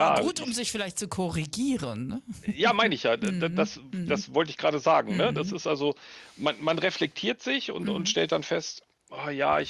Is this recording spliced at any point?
no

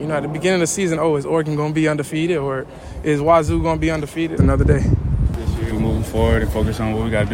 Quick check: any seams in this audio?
yes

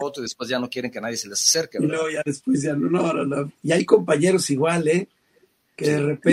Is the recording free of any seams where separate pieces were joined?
no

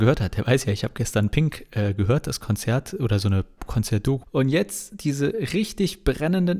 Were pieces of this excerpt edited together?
yes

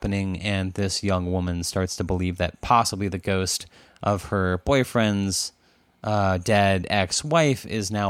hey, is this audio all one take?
yes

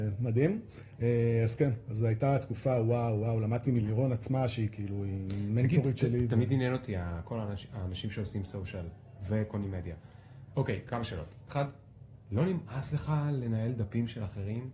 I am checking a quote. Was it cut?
yes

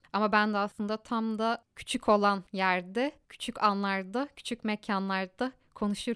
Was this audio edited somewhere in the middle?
no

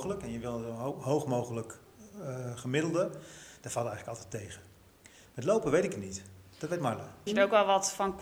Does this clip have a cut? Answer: yes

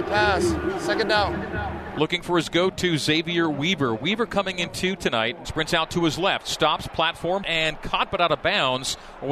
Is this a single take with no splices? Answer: no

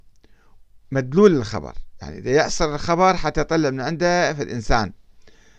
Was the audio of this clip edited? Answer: no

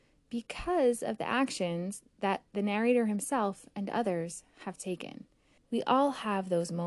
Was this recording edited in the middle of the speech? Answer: yes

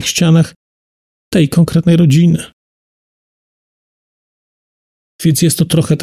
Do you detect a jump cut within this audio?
no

